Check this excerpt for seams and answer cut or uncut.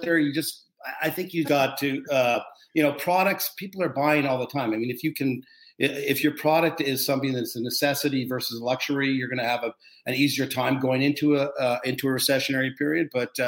cut